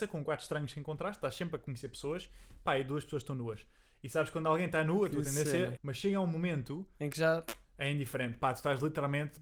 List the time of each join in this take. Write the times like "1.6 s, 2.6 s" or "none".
5.8 s